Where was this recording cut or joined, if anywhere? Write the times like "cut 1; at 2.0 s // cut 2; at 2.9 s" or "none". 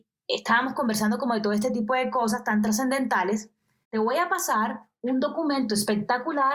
cut 1; at 3.8 s